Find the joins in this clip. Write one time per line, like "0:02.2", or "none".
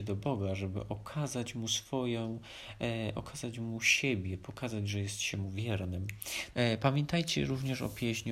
0:06.5